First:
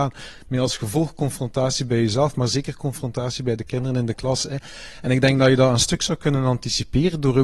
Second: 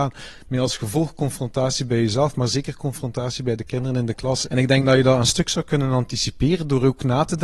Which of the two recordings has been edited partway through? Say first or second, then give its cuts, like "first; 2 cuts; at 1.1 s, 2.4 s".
second; 1 cut; at 4.4 s